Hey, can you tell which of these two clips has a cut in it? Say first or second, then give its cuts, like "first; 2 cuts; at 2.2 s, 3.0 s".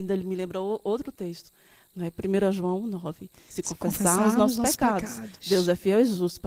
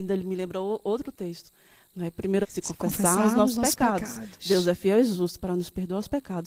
second; 1 cut; at 2.4 s